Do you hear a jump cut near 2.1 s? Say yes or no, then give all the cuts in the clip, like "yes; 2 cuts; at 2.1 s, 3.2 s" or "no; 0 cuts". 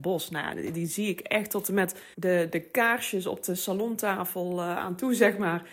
yes; 1 cut; at 2.1 s